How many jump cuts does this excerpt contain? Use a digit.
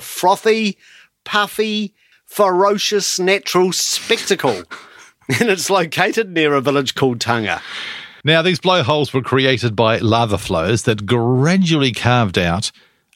2